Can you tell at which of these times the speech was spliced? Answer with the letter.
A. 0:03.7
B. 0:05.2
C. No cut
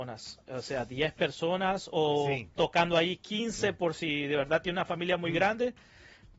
C